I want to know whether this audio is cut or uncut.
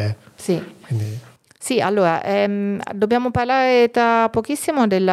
uncut